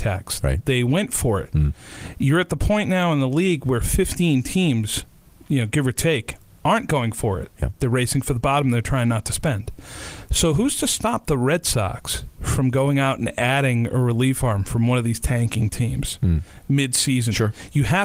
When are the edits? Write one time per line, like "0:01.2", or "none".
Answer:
none